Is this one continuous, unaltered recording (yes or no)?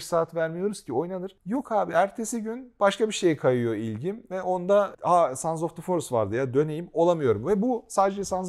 yes